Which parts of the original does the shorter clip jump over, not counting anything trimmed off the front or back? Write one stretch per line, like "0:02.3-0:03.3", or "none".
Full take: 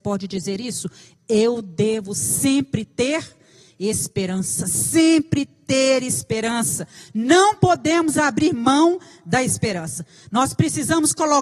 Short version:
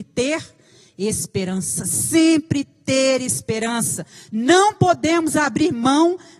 none